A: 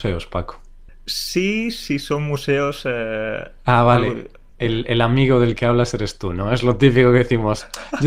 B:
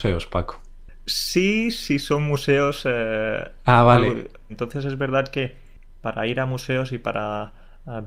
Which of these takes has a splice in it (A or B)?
B